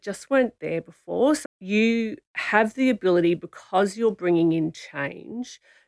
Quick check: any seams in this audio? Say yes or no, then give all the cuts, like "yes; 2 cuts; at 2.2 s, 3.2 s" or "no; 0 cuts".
yes; 1 cut; at 1.4 s